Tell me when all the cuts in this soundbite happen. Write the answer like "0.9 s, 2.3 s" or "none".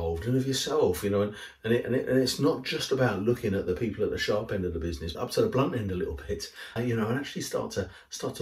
5.1 s, 6.8 s